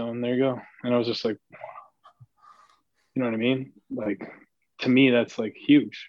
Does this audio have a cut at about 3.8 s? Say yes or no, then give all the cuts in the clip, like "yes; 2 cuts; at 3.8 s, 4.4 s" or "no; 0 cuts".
no; 0 cuts